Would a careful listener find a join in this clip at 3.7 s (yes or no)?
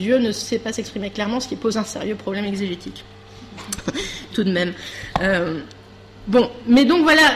no